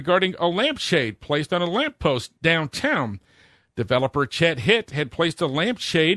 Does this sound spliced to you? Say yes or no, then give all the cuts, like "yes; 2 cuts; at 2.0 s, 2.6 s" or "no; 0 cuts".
no; 0 cuts